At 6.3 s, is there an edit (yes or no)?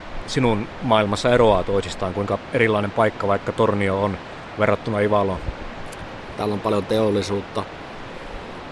yes